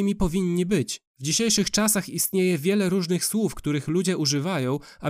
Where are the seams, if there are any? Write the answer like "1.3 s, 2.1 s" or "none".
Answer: 1.1 s